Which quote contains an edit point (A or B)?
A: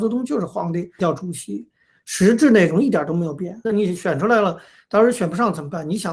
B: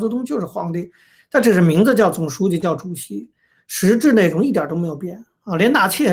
A